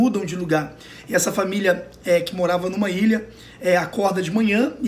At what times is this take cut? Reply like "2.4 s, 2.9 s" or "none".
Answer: none